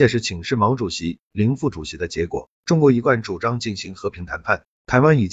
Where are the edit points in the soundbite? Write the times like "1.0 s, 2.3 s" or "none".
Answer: 2.5 s